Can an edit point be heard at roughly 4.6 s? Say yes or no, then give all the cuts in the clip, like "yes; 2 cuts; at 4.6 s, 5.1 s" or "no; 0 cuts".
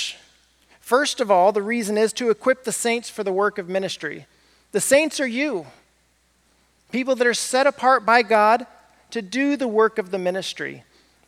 no; 0 cuts